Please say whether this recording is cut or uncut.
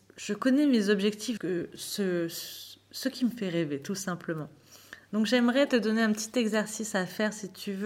cut